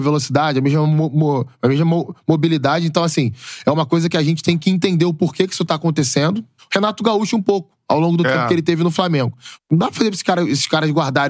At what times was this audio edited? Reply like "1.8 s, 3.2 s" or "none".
6.6 s, 9.6 s